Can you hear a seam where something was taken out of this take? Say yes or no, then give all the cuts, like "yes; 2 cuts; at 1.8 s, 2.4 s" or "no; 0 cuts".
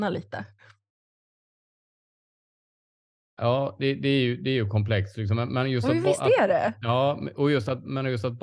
no; 0 cuts